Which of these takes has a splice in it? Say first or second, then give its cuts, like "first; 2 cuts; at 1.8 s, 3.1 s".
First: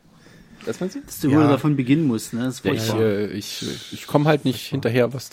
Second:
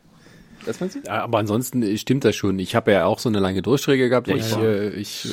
second; 2 cuts; at 1.0 s, 4.2 s